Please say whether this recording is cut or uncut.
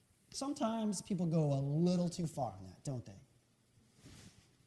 uncut